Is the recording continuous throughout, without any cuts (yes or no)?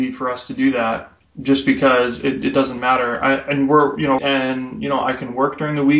no